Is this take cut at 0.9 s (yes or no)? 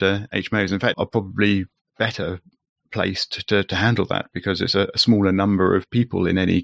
yes